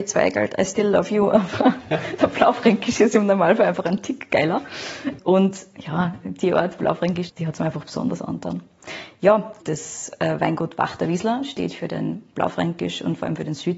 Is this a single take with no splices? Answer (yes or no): no